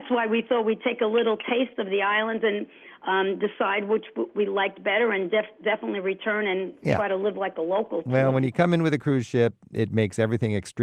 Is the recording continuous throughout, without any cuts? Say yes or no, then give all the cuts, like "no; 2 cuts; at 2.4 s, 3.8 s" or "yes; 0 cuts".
yes; 0 cuts